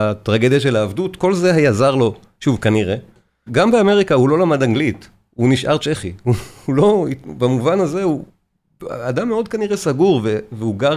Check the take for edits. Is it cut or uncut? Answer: cut